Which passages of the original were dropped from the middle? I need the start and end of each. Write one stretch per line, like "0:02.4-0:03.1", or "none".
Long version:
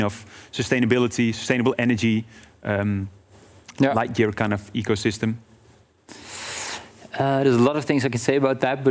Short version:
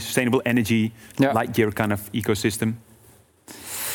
0:02.4-0:03.7